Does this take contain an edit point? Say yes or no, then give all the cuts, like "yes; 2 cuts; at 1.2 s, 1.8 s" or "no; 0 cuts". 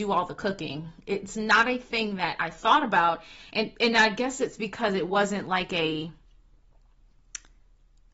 no; 0 cuts